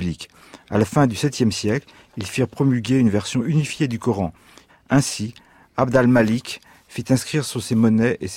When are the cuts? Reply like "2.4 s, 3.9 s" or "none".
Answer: 4.7 s